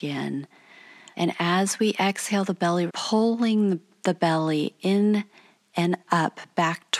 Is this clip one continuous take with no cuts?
no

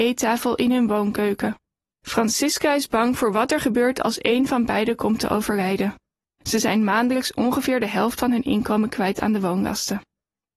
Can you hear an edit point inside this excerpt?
yes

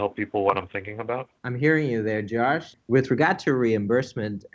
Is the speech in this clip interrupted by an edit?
yes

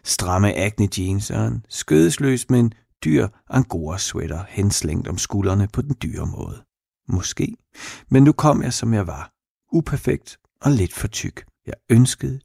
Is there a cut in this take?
yes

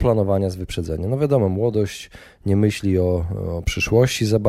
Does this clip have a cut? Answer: no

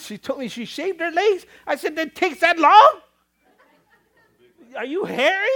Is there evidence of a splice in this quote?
no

